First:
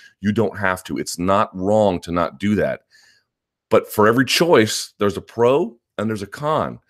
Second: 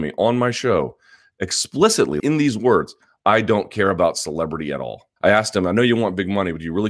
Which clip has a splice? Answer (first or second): second